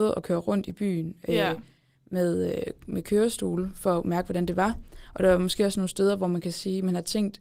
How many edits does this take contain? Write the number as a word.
zero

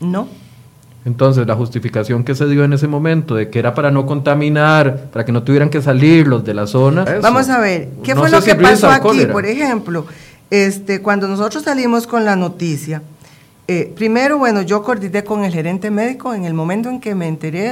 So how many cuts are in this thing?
one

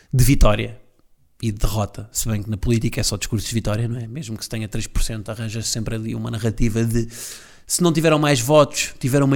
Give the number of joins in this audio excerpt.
zero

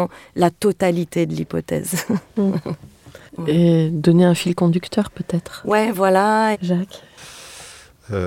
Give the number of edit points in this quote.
two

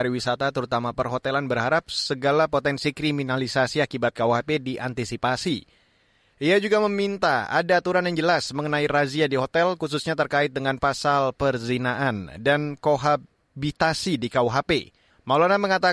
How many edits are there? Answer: zero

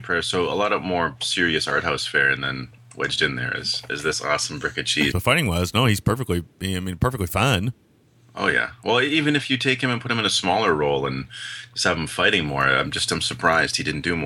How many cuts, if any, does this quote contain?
one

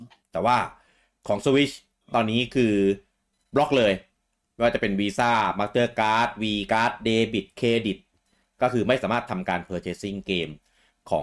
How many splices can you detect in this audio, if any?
zero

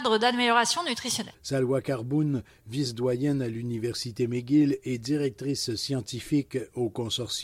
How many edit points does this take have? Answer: one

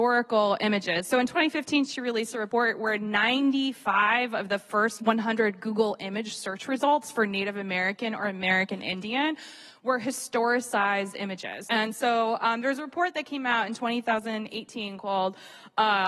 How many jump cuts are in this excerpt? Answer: one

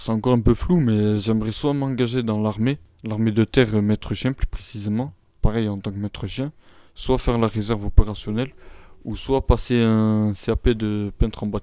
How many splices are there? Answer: one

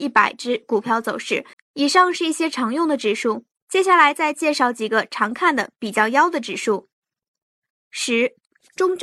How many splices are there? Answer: two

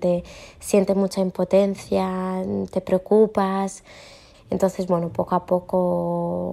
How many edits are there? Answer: one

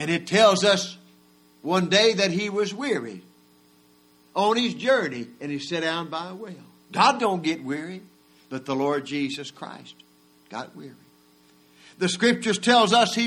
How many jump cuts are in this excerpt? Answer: zero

